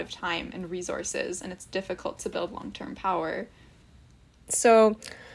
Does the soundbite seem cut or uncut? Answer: cut